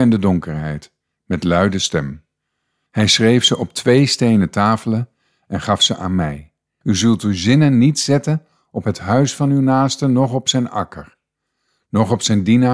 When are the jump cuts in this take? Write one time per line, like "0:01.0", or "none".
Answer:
0:02.9
0:06.8